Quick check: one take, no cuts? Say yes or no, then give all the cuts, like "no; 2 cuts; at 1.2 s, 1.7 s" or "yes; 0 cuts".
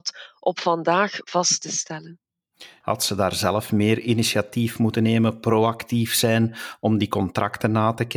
no; 1 cut; at 2.8 s